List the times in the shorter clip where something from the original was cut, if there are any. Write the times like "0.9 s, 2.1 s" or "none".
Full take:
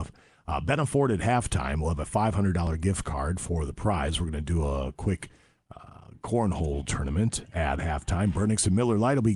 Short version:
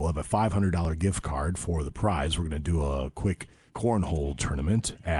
3.7 s